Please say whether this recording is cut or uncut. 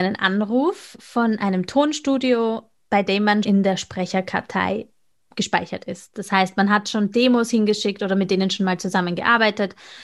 cut